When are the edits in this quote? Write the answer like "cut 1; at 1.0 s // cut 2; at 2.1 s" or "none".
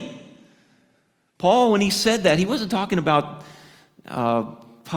none

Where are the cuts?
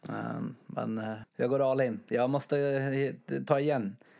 cut 1; at 1.2 s

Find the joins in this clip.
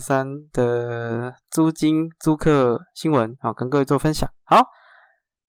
cut 1; at 4.4 s

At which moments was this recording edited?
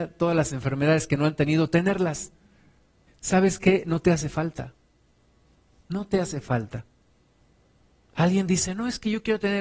cut 1; at 3.1 s

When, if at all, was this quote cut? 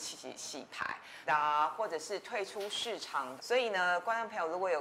cut 1; at 1.3 s // cut 2; at 3.4 s

